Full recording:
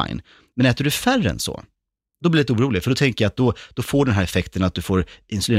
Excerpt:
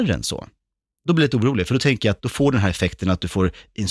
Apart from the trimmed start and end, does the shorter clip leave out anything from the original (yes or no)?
yes